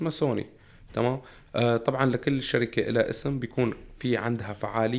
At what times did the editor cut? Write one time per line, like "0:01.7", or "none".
none